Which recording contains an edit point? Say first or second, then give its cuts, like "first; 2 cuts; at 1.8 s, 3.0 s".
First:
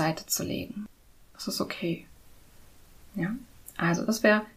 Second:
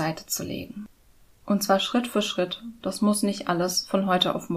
first; 1 cut; at 1.3 s